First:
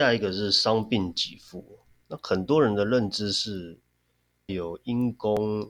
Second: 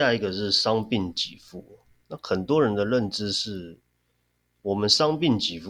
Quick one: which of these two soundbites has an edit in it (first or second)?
first